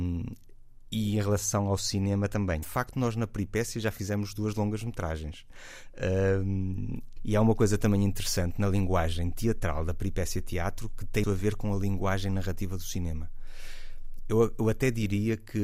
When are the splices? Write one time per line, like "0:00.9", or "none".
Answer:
0:02.6
0:07.2
0:11.2

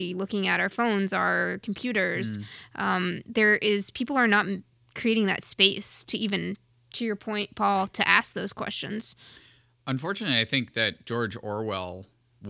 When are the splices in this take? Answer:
none

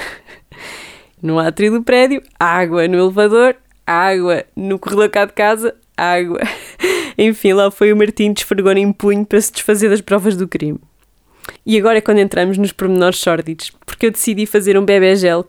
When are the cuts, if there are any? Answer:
0:01.1

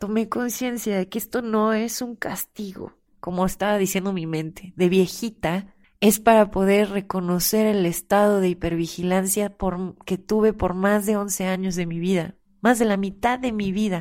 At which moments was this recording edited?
0:03.1

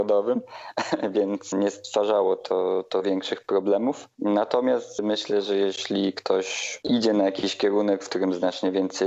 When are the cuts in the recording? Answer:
none

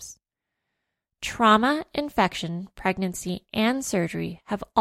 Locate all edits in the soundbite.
none

